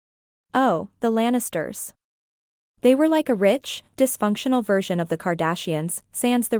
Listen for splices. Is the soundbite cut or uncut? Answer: uncut